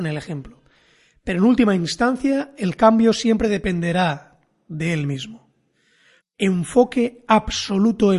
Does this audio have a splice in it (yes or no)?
yes